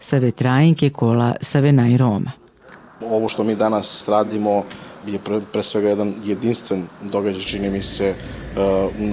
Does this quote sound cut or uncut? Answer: cut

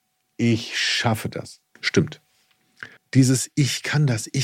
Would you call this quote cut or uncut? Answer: cut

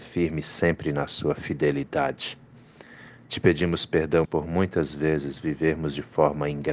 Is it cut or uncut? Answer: cut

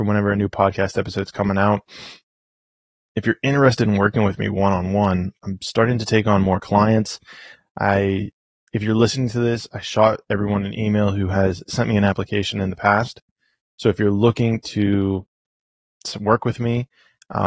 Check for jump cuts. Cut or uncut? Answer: cut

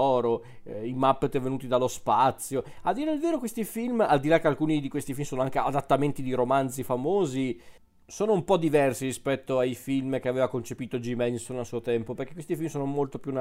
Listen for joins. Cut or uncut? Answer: uncut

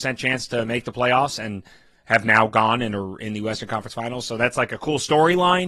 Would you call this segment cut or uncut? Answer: uncut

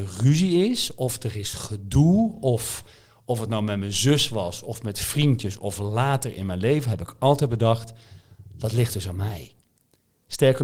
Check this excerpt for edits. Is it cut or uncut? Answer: uncut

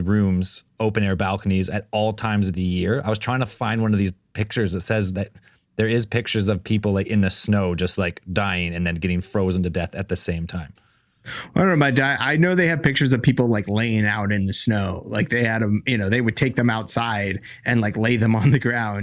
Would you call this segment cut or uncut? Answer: uncut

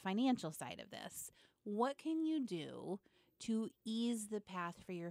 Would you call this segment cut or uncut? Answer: uncut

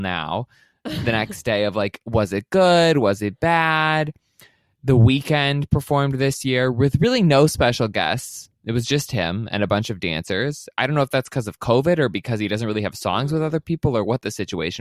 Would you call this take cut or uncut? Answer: uncut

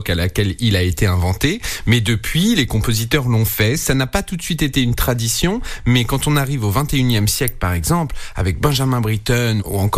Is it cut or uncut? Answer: uncut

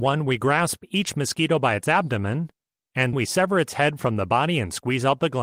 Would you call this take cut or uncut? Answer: cut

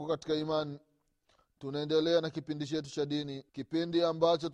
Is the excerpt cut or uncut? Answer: cut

